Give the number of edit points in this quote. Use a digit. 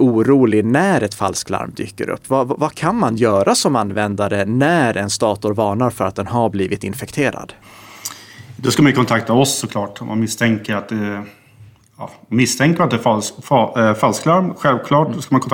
0